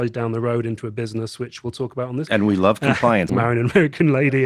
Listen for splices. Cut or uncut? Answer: cut